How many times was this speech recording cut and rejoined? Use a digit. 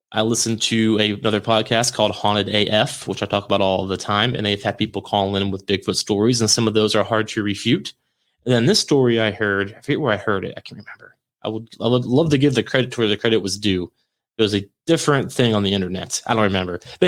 0